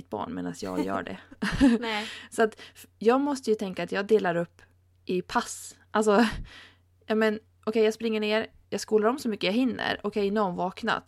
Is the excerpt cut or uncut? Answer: uncut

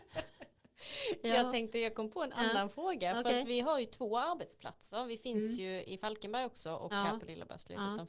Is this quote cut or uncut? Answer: uncut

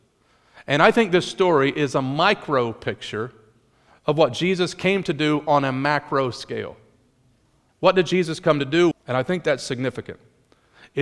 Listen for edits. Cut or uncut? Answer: cut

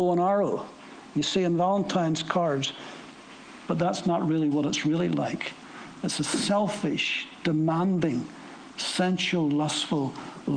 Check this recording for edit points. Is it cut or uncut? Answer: uncut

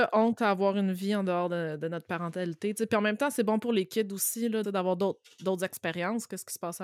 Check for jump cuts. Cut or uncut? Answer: cut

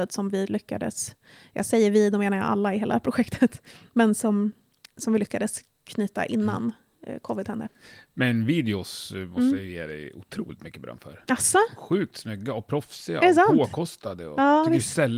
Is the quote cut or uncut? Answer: uncut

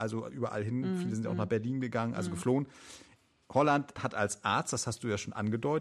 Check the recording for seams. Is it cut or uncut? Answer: cut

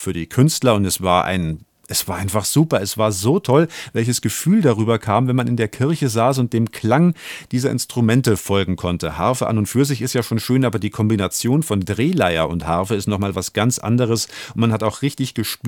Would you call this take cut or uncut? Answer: uncut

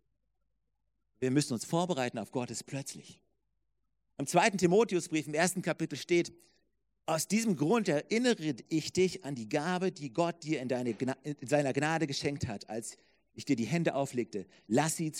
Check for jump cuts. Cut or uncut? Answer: cut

